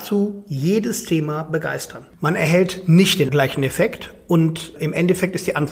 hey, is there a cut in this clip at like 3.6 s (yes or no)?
no